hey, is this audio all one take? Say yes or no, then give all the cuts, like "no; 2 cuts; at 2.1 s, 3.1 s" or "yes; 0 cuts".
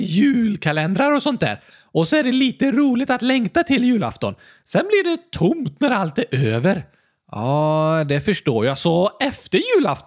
yes; 0 cuts